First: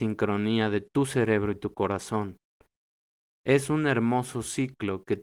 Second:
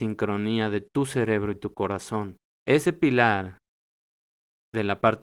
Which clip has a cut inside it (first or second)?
second